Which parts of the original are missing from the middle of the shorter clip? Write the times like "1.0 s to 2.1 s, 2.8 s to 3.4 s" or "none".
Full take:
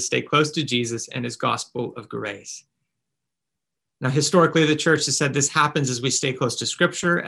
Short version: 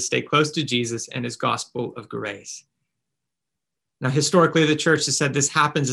none